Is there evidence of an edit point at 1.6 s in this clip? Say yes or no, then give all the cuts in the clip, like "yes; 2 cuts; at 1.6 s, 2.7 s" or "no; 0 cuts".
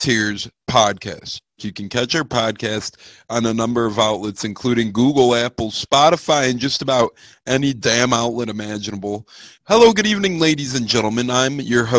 yes; 2 cuts; at 1.6 s, 9.6 s